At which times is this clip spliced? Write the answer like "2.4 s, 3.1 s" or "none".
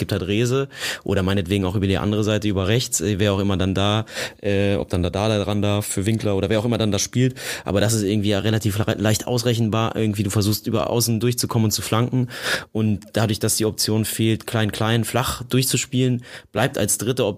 none

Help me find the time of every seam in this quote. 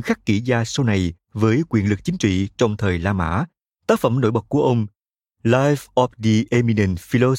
3.7 s

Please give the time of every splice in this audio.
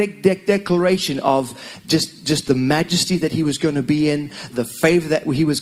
4.5 s

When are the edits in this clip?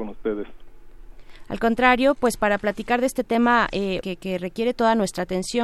4.0 s

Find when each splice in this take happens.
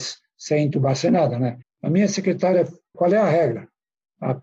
1.6 s, 2.9 s

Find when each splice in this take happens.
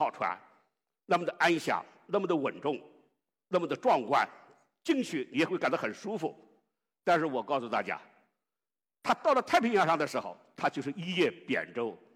none

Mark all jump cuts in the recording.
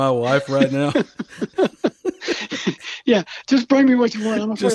none

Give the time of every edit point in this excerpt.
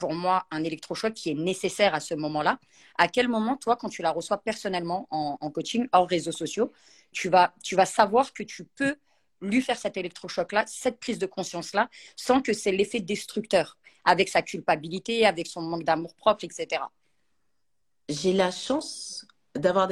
7.1 s

